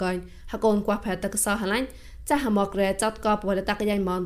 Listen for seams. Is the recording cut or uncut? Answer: cut